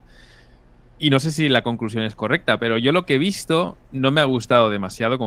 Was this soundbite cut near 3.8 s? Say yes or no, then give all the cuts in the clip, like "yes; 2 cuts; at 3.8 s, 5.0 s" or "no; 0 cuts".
yes; 1 cut; at 3.8 s